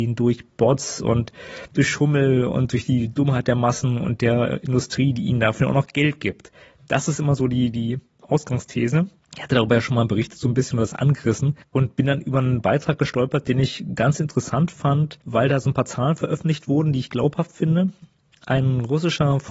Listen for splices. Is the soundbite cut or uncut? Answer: uncut